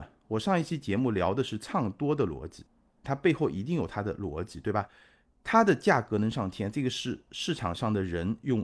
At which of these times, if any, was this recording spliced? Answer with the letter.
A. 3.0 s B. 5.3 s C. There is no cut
A